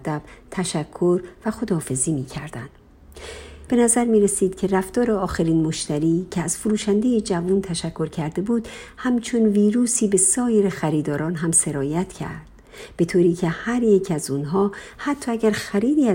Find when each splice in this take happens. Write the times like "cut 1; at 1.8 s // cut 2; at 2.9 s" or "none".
cut 1; at 3.7 s